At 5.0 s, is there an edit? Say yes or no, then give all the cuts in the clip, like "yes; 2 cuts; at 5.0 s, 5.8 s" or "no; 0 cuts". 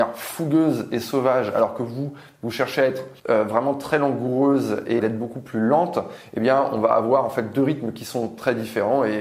yes; 2 cuts; at 3.2 s, 5.0 s